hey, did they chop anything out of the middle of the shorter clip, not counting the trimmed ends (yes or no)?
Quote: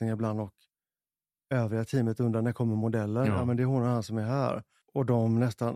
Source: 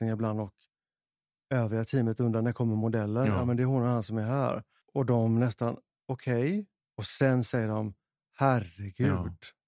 no